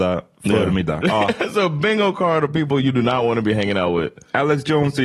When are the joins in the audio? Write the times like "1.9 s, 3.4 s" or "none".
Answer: 1.0 s

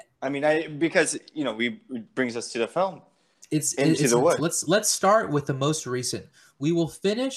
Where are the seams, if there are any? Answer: 4.4 s

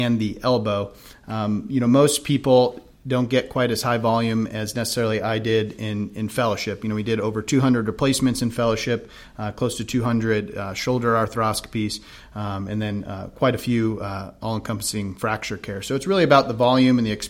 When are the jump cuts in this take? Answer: none

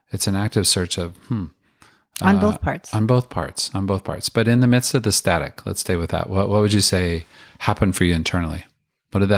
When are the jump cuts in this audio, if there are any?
none

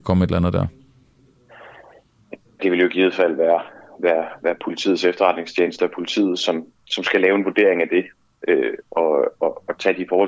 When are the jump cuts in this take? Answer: 2.6 s

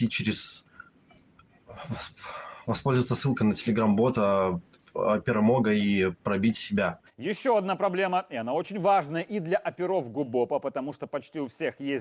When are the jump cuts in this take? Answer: none

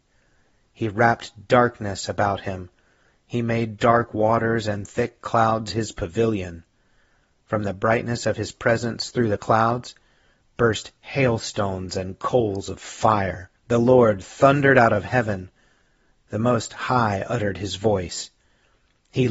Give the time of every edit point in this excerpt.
13.6 s

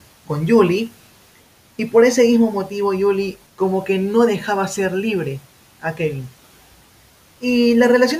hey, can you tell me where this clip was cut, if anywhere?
3.5 s

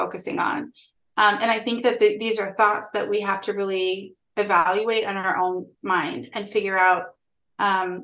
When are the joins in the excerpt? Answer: 1.0 s

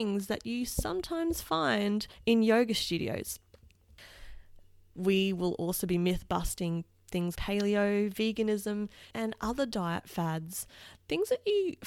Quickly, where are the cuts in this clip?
7.3 s, 9.1 s

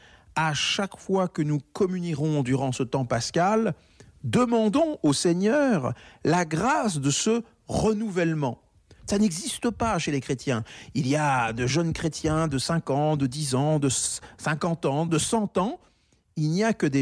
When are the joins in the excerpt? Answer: 9.0 s, 15.1 s

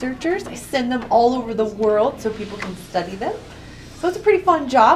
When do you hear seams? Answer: none

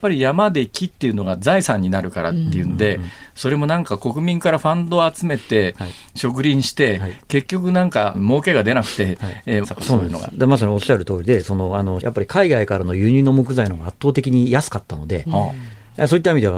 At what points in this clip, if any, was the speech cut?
8.1 s, 9.6 s, 12.0 s

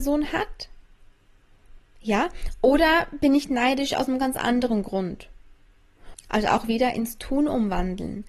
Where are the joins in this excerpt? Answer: 6.1 s

